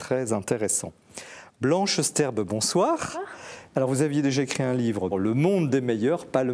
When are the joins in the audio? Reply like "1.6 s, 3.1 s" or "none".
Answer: 3.7 s, 5.1 s